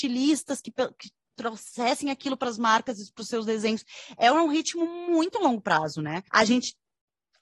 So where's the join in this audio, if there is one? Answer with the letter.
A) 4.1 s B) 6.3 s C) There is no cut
B